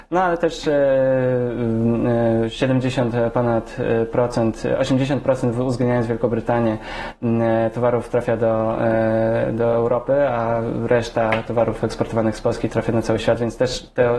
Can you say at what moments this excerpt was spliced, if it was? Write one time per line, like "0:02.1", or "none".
none